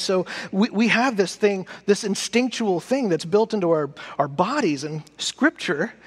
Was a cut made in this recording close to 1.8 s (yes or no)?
no